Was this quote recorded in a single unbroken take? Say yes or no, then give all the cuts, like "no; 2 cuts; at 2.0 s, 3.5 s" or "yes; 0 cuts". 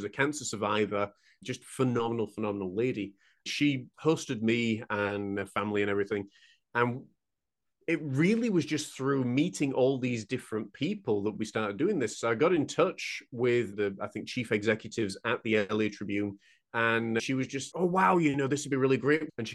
no; 1 cut; at 17.7 s